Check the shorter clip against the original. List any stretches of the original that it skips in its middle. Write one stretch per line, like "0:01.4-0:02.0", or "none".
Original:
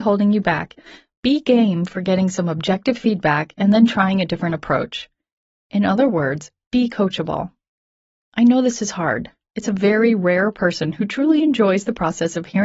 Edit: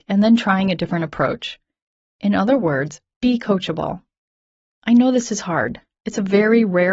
none